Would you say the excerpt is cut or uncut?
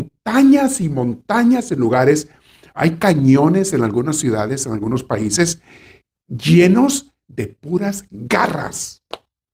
uncut